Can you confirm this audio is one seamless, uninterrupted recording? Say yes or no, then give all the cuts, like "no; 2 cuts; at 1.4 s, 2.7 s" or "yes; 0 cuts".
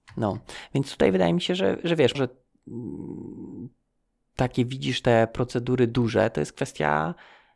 no; 1 cut; at 2.1 s